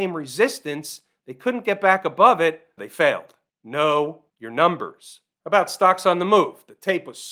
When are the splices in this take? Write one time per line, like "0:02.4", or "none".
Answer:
0:02.8